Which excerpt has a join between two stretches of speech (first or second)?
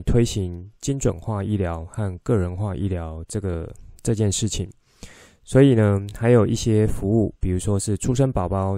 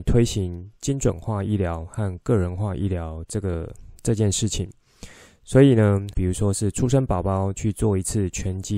second